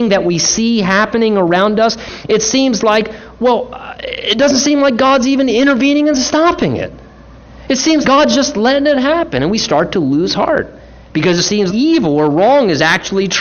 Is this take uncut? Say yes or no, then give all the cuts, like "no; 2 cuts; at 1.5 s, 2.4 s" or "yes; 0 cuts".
no; 2 cuts; at 8.0 s, 11.7 s